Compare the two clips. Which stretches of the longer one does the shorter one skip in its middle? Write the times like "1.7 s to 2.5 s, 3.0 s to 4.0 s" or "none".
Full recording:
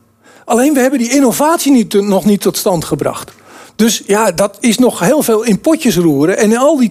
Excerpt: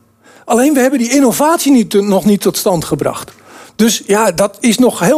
none